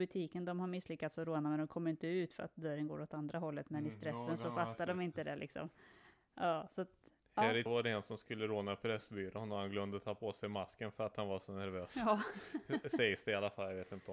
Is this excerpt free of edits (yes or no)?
yes